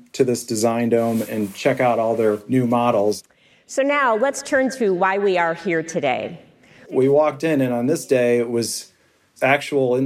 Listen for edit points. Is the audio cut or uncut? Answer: cut